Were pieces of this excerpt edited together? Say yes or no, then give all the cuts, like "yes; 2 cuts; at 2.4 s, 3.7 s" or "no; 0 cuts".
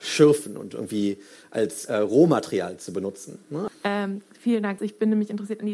yes; 3 cuts; at 1.9 s, 3.7 s, 4.8 s